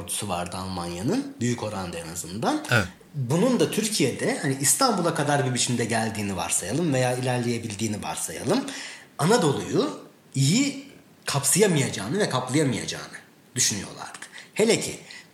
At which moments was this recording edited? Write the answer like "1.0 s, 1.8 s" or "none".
none